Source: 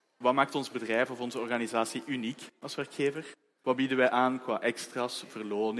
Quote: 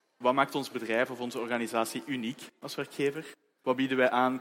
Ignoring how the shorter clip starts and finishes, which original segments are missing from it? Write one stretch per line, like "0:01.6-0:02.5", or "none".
none